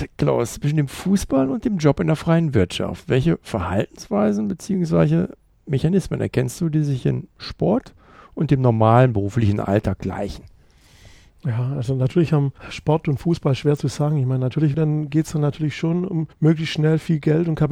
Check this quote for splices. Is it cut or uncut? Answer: cut